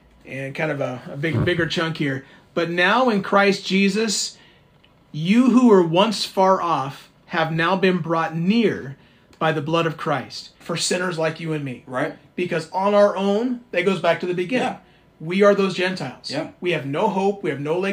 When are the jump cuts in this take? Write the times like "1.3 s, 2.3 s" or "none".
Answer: 10.6 s